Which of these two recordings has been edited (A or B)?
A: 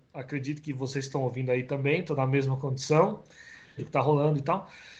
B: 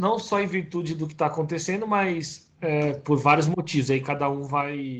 A